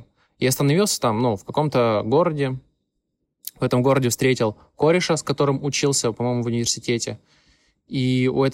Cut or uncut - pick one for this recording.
uncut